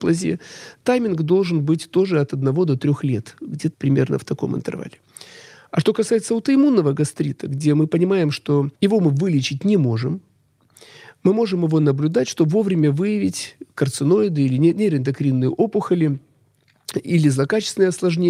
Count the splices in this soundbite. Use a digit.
2